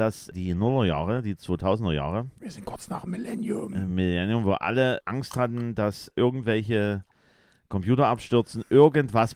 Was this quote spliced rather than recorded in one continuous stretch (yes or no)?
no